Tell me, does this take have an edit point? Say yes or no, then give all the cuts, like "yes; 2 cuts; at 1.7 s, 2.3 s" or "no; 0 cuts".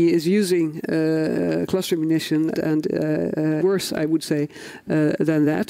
yes; 2 cuts; at 2.5 s, 3.6 s